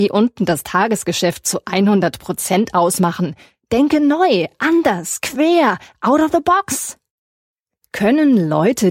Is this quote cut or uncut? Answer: uncut